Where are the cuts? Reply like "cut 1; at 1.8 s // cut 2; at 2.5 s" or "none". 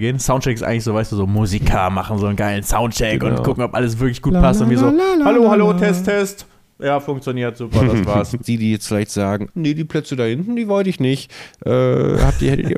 cut 1; at 8.4 s // cut 2; at 9.5 s